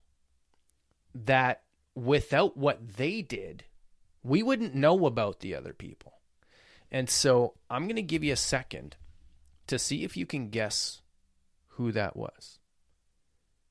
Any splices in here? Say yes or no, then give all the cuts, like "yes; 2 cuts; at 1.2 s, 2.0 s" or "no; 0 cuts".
no; 0 cuts